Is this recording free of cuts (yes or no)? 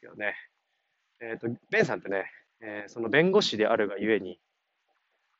yes